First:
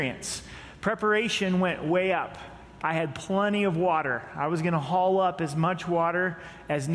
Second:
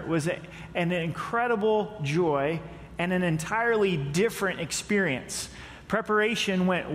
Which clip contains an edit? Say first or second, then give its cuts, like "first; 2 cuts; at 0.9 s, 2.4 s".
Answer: first; 1 cut; at 2.8 s